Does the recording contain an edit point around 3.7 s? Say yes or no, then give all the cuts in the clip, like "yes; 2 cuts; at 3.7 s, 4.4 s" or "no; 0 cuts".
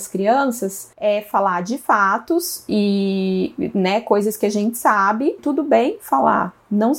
no; 1 cut; at 5.4 s